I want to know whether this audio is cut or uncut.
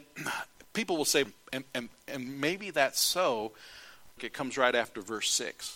cut